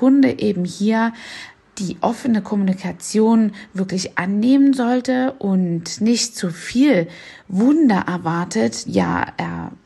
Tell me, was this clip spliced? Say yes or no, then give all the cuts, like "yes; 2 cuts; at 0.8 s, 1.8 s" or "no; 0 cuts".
yes; 1 cut; at 8.9 s